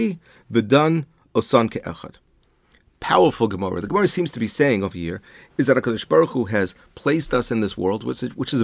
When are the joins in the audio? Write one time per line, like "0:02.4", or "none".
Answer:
none

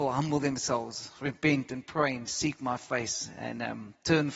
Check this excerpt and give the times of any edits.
none

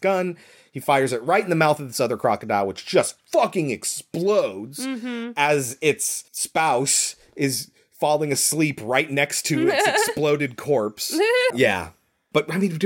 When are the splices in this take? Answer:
0:06.3
0:11.5

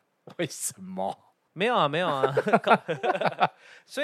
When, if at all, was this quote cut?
0:01.5

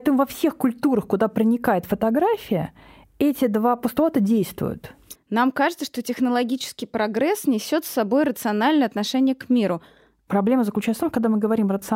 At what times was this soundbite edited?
0:05.1
0:10.3

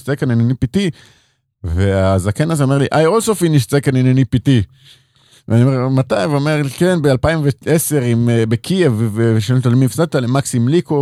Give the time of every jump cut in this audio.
none

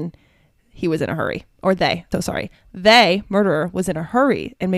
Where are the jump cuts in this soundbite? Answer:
0:02.1

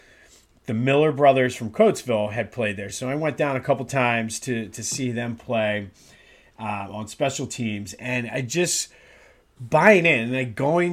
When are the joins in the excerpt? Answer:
none

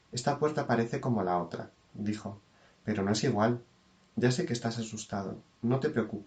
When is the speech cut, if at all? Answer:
none

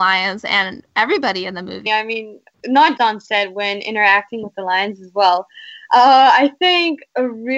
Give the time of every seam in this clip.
0:01.9
0:03.0

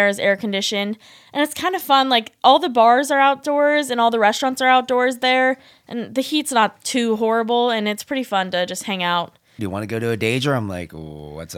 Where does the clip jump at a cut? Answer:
0:09.6

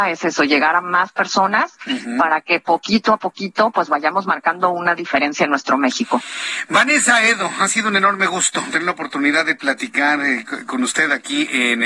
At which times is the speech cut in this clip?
none

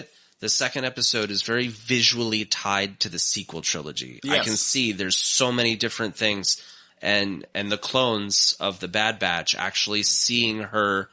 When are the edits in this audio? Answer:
0:06.9

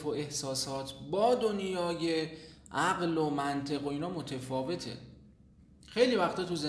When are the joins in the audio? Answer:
none

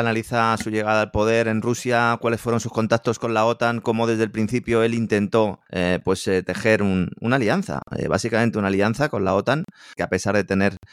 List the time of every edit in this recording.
0:05.6
0:10.0

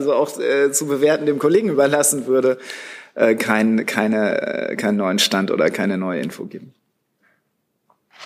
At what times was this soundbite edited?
none

